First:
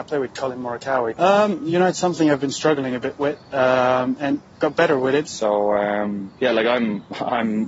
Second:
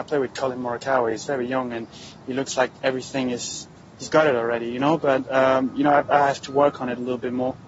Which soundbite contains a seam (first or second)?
first